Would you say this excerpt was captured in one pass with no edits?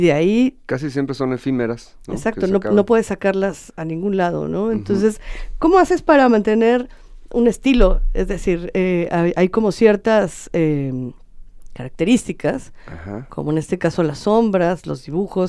yes; 0 cuts

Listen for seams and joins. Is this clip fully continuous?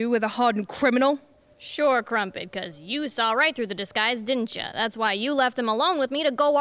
yes; 0 cuts

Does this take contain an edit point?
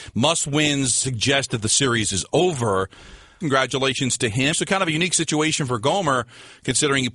yes; 2 cuts; at 3.4 s, 4.5 s

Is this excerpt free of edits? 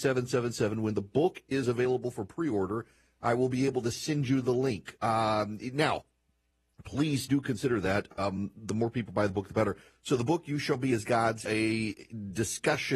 no; 1 cut; at 11.5 s

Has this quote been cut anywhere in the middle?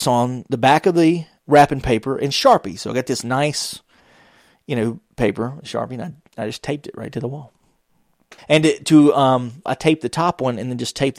yes; 2 cuts; at 8.4 s, 9.7 s

